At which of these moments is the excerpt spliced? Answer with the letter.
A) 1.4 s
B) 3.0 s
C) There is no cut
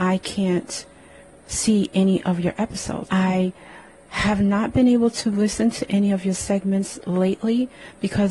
B